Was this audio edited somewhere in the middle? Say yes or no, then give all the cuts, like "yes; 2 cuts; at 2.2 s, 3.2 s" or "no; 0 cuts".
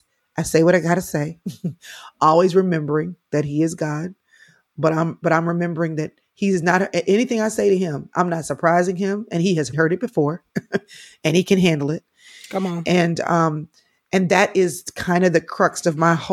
yes; 1 cut; at 9.7 s